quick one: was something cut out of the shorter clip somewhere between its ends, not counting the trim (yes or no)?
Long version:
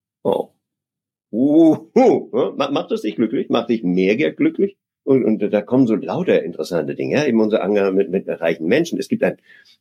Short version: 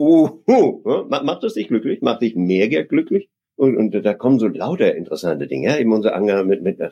no